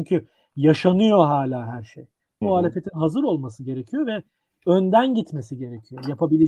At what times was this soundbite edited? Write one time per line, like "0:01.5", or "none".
0:02.4